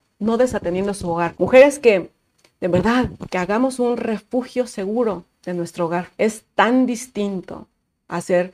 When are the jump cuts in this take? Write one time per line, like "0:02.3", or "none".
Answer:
0:01.3
0:06.1